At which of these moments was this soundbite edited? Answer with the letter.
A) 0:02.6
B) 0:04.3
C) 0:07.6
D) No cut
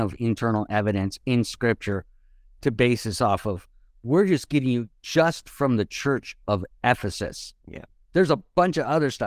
D